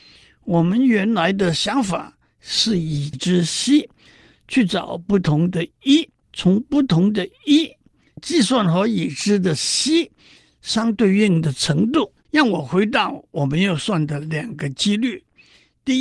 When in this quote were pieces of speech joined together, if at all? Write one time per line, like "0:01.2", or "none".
0:06.2
0:12.2